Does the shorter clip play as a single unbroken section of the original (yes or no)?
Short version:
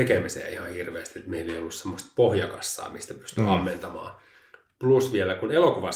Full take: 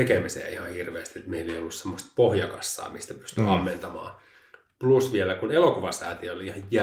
yes